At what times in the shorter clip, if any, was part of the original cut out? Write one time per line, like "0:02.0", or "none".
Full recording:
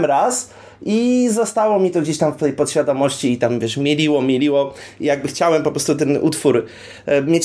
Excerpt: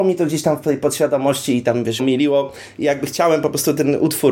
0:02.0